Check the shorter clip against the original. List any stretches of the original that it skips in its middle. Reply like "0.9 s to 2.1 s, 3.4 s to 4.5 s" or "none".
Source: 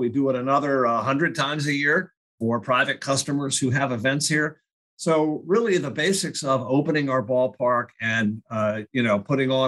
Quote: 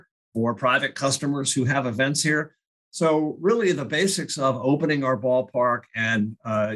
none